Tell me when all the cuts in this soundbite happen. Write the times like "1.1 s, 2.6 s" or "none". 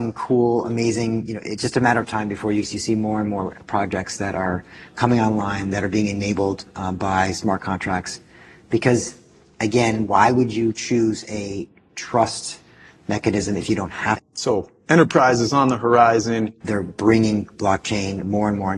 14.2 s, 16.6 s

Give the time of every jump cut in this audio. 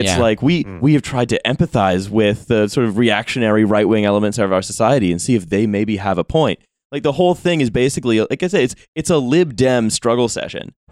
none

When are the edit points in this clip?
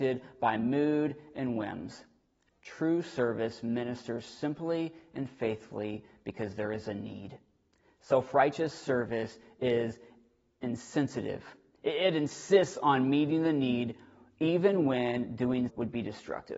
15.7 s

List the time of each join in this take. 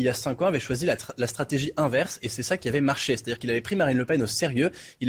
none

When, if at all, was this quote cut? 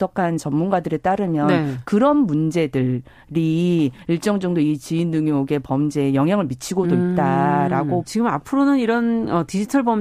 8.0 s

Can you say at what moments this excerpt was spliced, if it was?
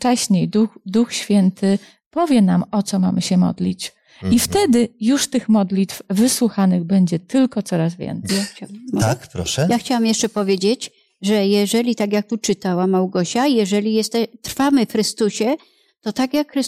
8.3 s

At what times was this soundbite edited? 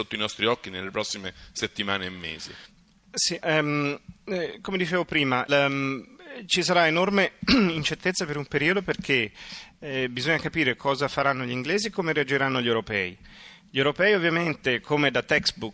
3.4 s, 5.5 s

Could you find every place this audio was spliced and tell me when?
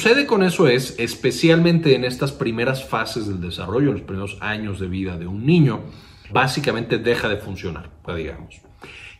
6.3 s, 8.1 s

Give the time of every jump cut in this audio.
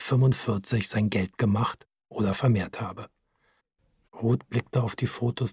4.0 s

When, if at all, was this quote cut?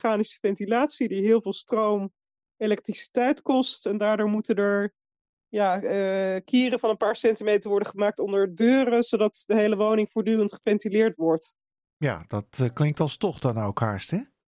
none

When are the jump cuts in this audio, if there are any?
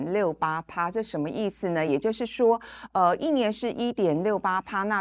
none

